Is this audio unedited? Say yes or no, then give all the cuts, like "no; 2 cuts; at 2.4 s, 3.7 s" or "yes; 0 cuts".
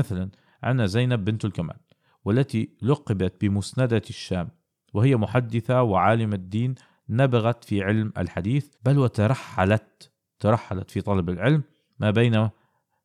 no; 1 cut; at 8.7 s